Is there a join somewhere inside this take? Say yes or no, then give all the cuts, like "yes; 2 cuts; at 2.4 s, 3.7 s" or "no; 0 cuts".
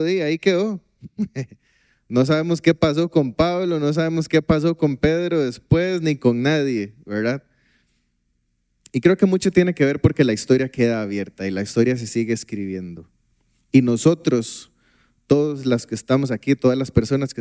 no; 0 cuts